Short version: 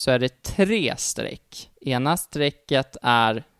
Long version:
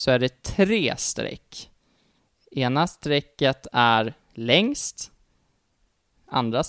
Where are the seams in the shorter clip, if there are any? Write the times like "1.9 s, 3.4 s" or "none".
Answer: 1.8 s